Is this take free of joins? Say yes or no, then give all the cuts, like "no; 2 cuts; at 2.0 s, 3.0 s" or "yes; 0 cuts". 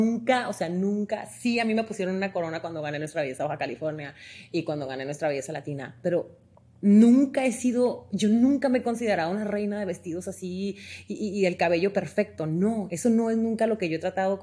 yes; 0 cuts